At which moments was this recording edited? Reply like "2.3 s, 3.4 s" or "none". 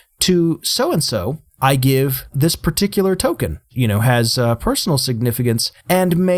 3.7 s